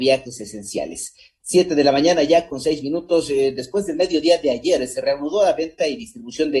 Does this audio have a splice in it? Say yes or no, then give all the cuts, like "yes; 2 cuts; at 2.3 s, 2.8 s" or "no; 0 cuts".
no; 0 cuts